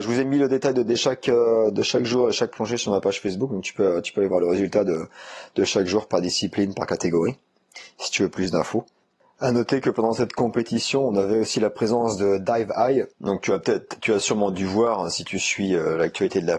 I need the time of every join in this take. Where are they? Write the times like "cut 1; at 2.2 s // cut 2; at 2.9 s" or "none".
cut 1; at 13.1 s